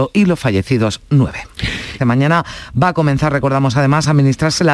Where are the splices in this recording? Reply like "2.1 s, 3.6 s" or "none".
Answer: 2.0 s